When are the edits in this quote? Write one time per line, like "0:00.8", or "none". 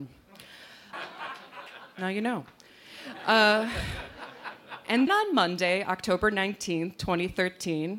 0:00.9
0:05.1